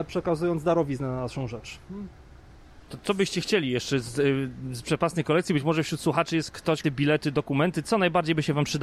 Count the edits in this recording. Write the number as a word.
one